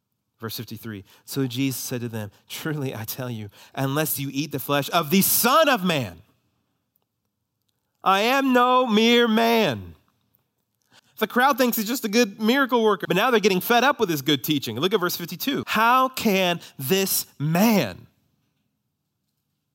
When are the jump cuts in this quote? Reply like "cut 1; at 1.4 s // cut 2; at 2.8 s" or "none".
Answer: cut 1; at 11.0 s // cut 2; at 13.0 s // cut 3; at 15.6 s